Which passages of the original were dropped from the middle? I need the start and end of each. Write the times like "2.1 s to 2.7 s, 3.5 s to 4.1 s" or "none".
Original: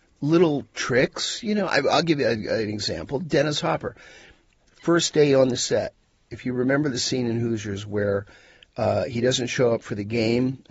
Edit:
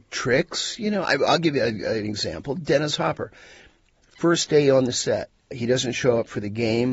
6.2 s to 9.1 s